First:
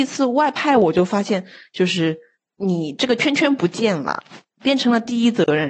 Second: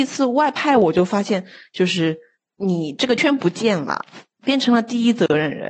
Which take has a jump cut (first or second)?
second